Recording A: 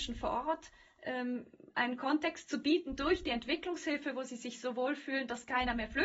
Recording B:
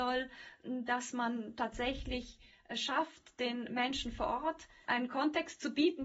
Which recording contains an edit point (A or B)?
B